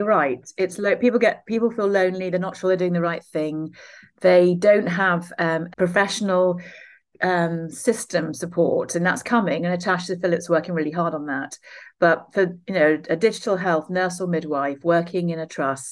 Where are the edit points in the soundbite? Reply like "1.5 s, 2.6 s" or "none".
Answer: 5.7 s